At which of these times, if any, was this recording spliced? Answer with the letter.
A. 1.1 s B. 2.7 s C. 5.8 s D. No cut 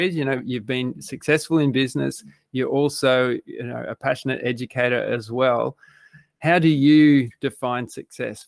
D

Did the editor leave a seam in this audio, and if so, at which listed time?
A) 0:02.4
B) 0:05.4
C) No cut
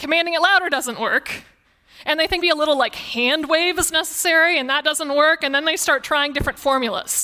A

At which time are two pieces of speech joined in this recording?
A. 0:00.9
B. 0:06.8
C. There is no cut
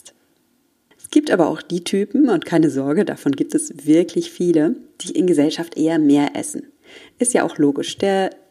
A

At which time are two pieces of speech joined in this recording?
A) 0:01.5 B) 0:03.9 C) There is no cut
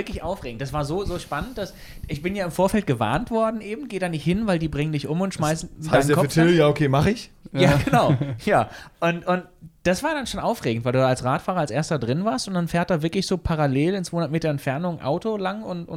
C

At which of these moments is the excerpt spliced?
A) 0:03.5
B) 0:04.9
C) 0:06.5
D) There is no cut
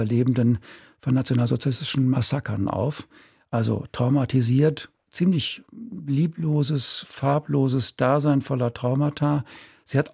D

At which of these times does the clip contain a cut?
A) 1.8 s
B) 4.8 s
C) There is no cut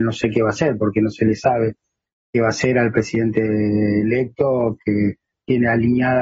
C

